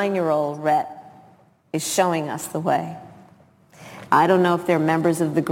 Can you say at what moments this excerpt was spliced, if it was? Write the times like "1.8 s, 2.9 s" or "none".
4.1 s